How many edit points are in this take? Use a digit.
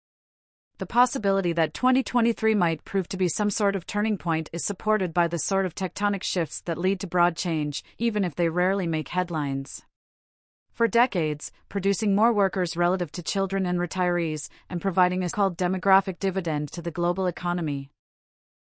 2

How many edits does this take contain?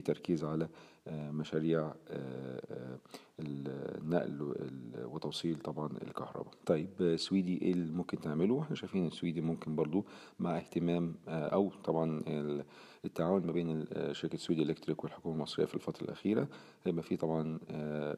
1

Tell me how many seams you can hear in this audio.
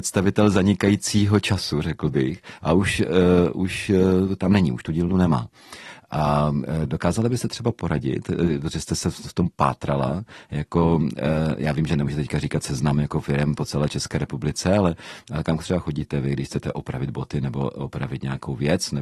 0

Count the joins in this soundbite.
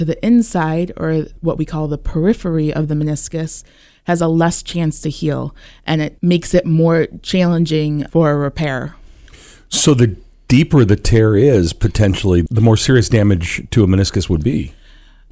0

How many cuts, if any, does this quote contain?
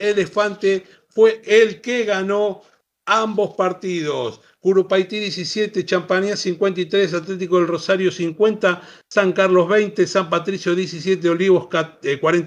1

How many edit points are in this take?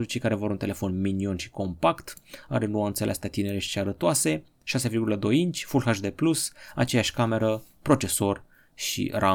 0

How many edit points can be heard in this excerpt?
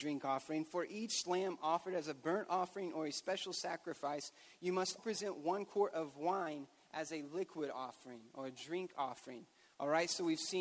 1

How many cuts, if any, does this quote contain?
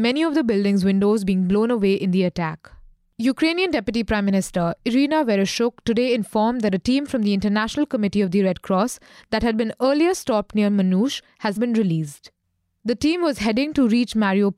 1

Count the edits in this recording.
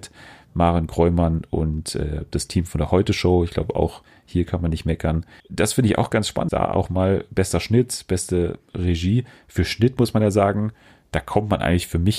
2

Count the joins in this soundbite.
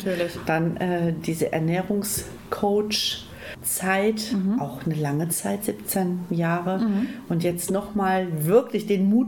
0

